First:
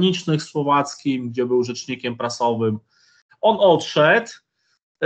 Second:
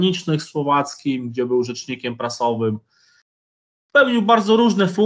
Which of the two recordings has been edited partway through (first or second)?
first